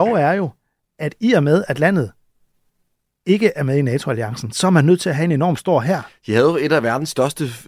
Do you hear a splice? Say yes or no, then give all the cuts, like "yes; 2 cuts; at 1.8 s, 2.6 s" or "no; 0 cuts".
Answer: no; 0 cuts